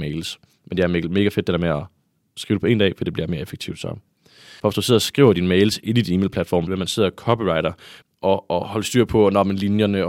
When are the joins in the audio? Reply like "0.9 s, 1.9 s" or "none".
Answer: 4.6 s, 6.7 s, 8.0 s